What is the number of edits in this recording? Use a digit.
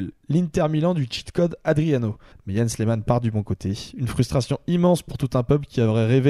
1